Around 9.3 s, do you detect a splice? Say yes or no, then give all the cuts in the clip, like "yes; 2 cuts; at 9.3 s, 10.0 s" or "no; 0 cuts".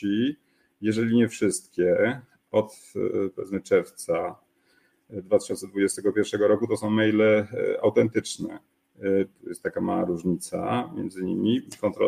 yes; 1 cut; at 9.3 s